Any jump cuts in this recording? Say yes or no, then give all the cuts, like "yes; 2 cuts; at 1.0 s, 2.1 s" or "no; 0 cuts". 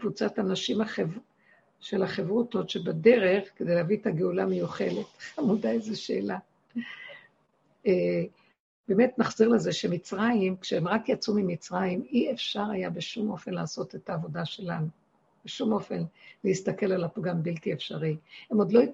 no; 0 cuts